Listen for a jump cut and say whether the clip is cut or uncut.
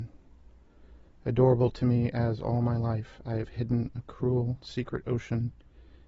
uncut